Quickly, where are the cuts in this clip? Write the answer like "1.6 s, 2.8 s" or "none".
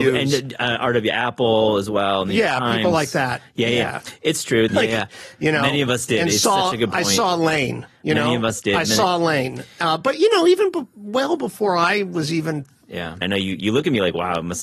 4.7 s, 13.2 s